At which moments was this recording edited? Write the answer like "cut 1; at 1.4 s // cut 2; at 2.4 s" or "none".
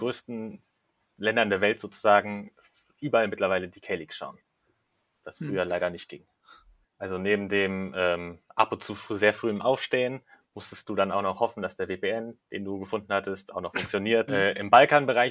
cut 1; at 6.8 s // cut 2; at 14.3 s